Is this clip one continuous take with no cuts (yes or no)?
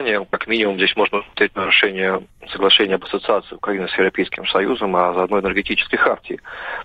yes